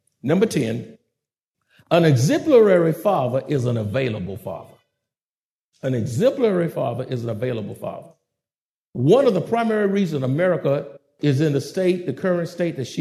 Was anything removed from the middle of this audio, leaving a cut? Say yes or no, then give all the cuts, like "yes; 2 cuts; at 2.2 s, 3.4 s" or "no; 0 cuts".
no; 0 cuts